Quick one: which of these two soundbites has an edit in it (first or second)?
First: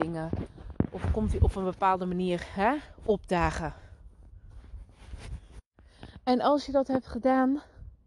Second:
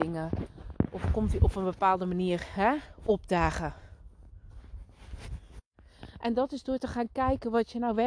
second